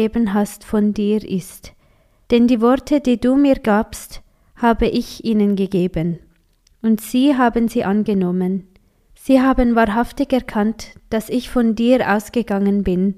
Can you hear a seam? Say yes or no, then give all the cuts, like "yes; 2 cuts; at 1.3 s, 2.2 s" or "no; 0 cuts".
no; 0 cuts